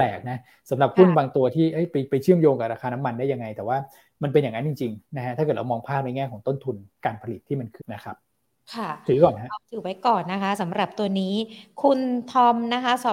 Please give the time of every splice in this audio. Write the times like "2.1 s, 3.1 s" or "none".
7.8 s, 9.6 s